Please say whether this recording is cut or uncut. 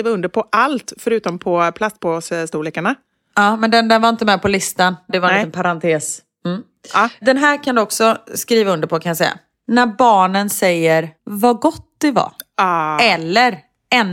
uncut